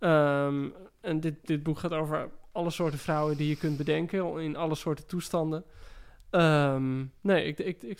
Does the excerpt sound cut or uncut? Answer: uncut